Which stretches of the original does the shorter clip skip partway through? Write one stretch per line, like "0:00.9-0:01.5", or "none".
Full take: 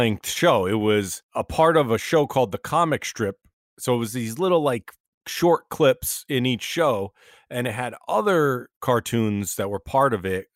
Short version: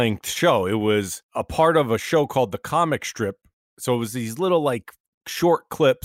none

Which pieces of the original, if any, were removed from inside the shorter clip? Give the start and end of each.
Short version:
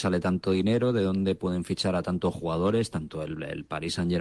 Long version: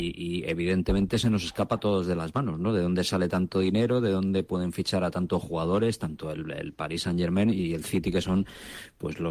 none

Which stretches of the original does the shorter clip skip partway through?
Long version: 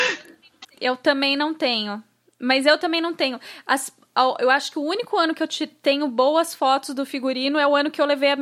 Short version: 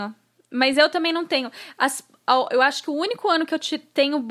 none

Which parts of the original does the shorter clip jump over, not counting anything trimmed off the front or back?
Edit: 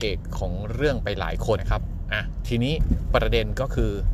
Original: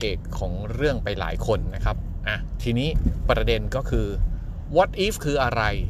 0:01.6-0:01.7

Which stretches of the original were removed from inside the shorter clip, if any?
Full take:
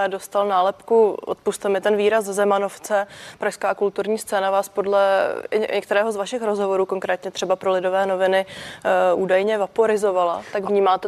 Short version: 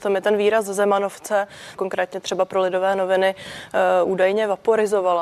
0:03.4-0:06.9

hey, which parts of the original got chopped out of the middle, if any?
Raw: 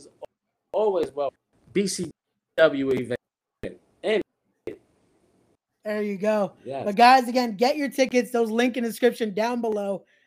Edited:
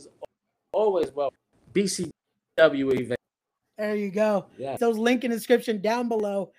0:03.6-0:05.6
0:06.8-0:08.3

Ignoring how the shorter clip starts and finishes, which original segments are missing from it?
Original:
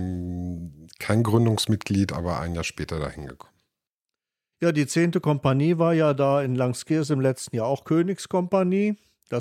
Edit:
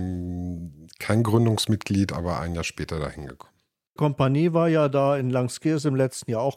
0:04.0-0:05.2

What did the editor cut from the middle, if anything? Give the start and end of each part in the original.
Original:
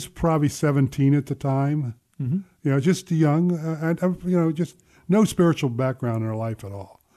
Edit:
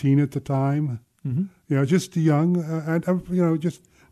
none

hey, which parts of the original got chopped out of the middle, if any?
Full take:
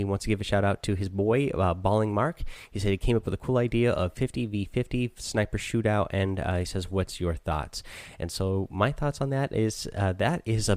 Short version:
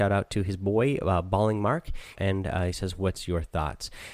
0:02.7-0:06.1

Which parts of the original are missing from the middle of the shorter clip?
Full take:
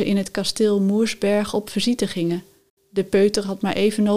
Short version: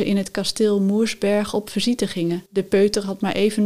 0:02.5-0:02.9

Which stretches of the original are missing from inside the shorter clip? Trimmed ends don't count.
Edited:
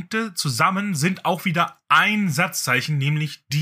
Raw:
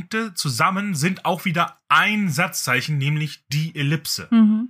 none

